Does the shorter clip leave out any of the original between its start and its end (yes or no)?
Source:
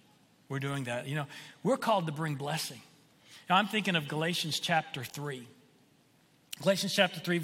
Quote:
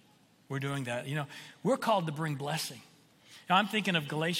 no